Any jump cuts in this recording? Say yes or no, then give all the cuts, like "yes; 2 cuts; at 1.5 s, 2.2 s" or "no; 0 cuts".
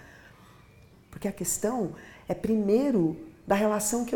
yes; 1 cut; at 0.9 s